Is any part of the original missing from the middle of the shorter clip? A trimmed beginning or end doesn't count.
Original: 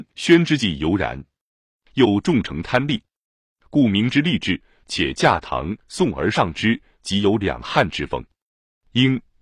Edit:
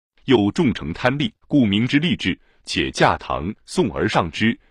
yes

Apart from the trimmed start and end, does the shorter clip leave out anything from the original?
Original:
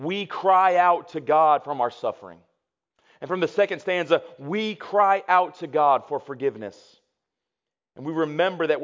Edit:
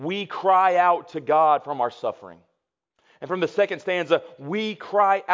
no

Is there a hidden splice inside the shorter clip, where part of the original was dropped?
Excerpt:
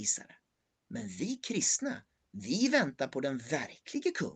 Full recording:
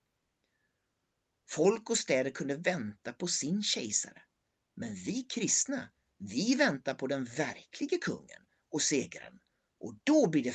no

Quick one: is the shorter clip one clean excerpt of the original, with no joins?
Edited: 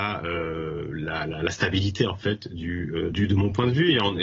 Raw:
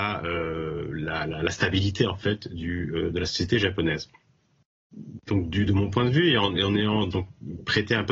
no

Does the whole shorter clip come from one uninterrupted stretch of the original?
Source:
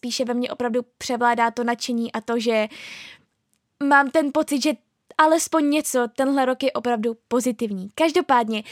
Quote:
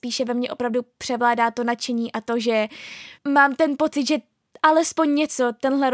no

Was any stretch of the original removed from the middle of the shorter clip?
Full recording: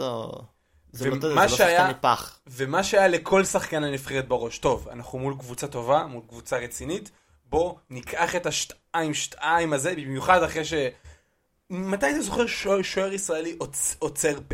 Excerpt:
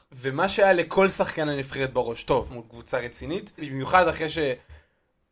yes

